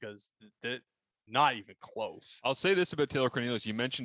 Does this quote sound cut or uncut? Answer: cut